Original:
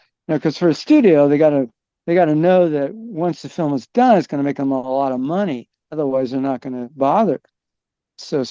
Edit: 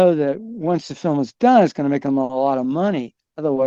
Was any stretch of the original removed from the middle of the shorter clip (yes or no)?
no